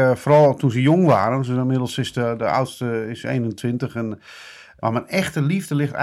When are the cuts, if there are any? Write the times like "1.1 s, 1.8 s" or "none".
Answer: 4.8 s